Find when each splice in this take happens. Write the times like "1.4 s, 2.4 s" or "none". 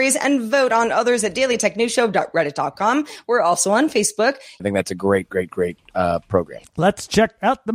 4.6 s, 6.6 s